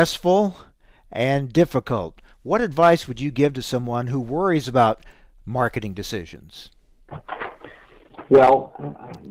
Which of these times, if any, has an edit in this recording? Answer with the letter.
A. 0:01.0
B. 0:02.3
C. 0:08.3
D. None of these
D